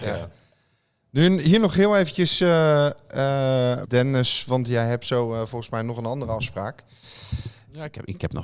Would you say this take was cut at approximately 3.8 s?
yes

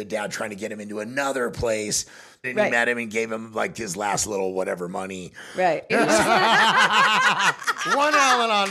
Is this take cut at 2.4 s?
yes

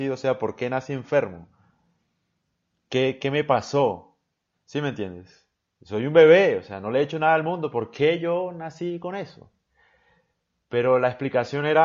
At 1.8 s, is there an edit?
no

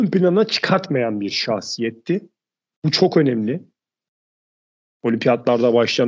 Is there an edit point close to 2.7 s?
no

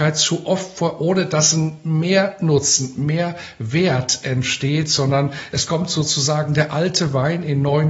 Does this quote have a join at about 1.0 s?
no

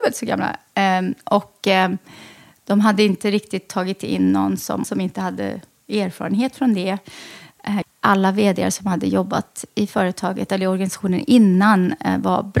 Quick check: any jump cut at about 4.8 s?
yes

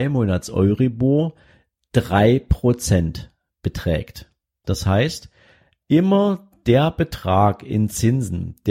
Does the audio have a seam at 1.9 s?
no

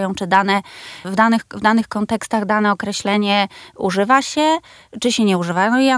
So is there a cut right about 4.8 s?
no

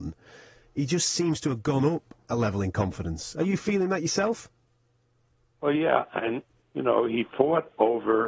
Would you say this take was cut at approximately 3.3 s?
no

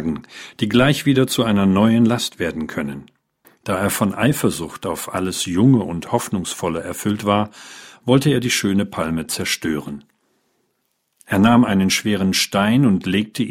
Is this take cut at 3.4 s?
yes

